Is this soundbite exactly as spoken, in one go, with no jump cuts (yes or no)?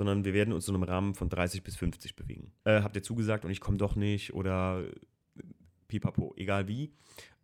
no